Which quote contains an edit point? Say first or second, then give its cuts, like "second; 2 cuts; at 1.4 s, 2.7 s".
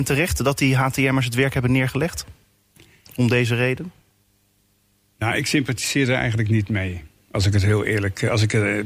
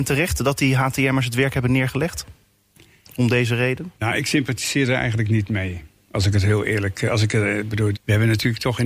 second; 2 cuts; at 4.0 s, 7.9 s